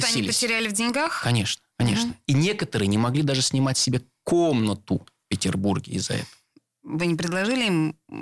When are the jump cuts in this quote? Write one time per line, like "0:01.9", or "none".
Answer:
none